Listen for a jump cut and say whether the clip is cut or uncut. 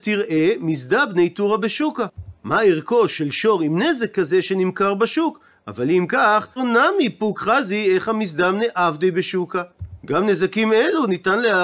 cut